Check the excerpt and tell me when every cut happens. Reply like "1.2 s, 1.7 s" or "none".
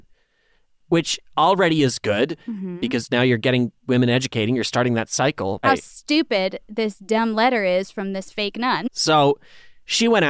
5.6 s, 8.8 s